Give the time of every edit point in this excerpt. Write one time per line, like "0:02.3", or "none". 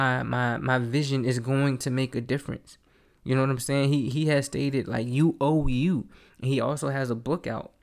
none